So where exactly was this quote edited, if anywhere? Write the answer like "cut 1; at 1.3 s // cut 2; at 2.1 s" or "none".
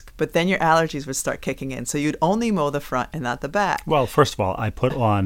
none